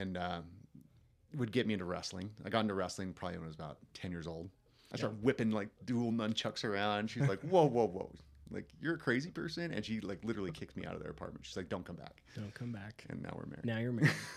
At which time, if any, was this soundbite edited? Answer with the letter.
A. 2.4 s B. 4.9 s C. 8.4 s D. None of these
B